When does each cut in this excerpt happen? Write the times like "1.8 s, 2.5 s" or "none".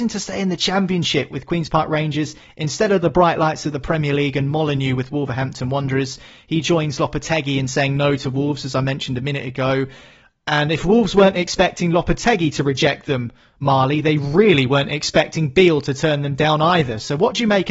none